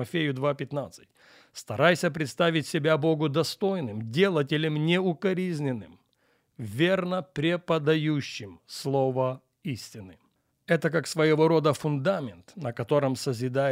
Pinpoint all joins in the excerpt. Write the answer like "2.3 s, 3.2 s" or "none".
10.5 s